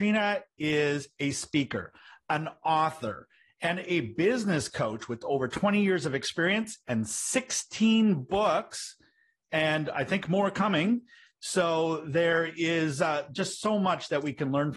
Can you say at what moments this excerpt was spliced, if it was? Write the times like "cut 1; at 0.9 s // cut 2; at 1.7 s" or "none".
none